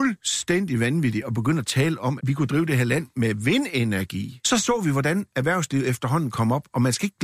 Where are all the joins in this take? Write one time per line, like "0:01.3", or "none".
0:02.2
0:04.4